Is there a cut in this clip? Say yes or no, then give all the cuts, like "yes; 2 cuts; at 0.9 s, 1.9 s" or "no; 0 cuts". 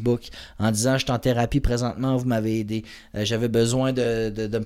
no; 0 cuts